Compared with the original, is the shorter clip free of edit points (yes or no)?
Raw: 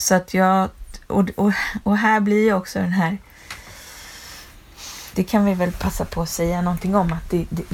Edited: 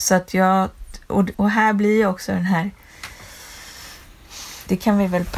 no